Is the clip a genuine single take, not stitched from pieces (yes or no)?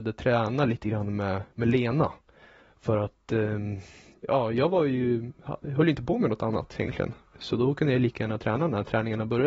yes